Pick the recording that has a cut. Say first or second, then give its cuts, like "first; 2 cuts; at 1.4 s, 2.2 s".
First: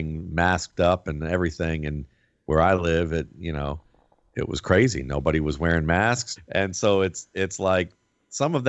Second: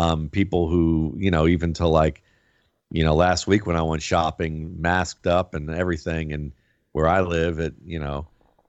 first; 1 cut; at 6.4 s